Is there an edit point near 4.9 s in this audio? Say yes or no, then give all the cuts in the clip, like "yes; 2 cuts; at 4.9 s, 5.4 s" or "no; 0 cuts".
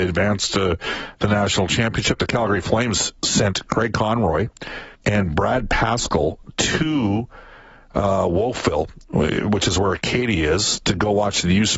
yes; 1 cut; at 4.9 s